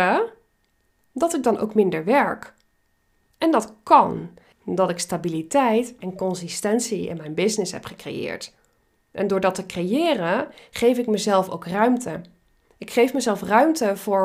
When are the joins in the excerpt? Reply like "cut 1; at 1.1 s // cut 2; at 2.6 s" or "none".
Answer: cut 1; at 4.5 s